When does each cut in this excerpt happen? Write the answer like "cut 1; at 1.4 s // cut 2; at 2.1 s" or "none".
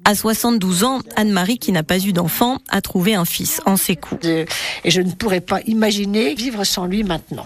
cut 1; at 4.2 s